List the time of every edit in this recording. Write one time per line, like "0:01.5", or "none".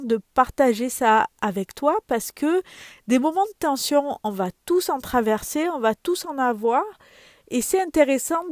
none